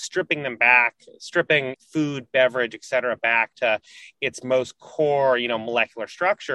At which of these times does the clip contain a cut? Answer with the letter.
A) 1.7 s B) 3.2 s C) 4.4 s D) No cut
A